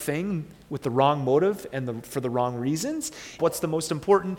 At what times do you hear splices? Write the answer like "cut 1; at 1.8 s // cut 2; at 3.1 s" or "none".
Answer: cut 1; at 3.4 s

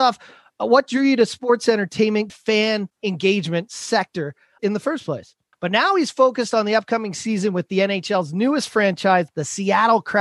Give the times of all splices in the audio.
cut 1; at 2.3 s // cut 2; at 5.5 s // cut 3; at 9.3 s

